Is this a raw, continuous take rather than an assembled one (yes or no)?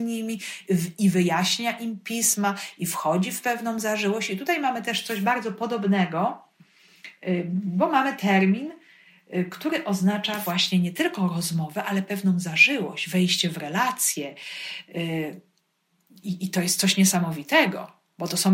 yes